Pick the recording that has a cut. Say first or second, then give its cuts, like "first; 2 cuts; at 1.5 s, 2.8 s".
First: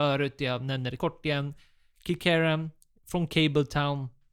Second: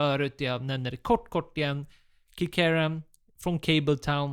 first; 1 cut; at 1.0 s